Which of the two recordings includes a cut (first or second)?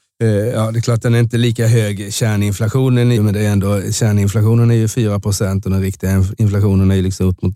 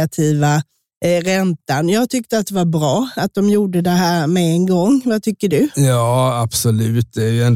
first